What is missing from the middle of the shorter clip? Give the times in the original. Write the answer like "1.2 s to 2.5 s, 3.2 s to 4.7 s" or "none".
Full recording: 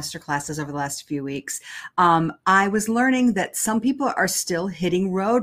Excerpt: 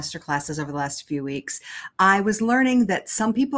1.9 s to 2.4 s